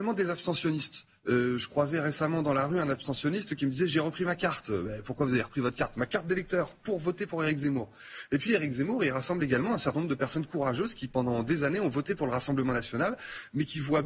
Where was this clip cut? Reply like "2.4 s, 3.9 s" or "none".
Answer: none